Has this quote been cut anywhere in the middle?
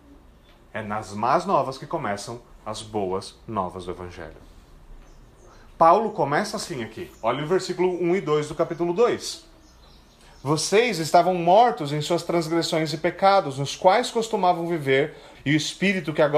yes; 1 cut; at 15.4 s

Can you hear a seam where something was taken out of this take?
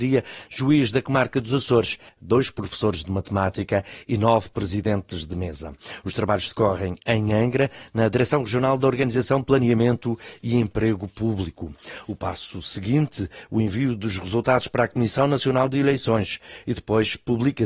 yes; 1 cut; at 2.1 s

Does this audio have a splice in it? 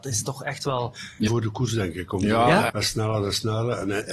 yes; 2 cuts; at 1.3 s, 2.7 s

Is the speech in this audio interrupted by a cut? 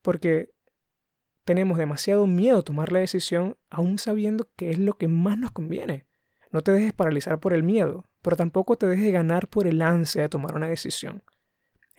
yes; 1 cut; at 6.4 s

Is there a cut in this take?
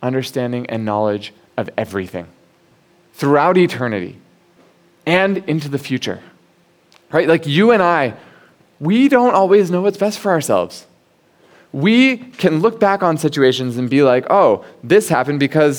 no; 0 cuts

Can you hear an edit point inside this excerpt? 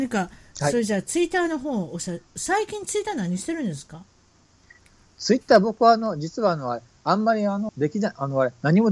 yes; 1 cut; at 7.7 s

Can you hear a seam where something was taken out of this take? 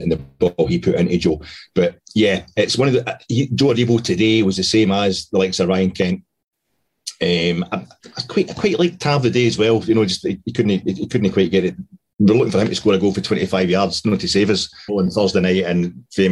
yes; 1 cut; at 14.9 s

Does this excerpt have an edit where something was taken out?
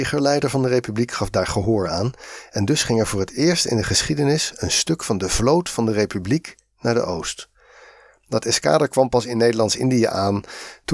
no; 0 cuts

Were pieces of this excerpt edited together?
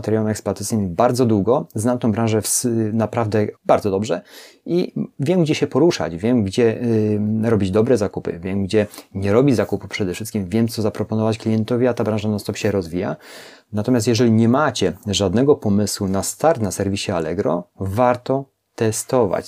yes; 1 cut; at 3.6 s

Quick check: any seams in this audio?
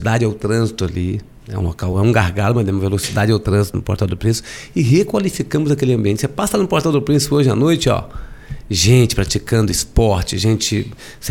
no; 0 cuts

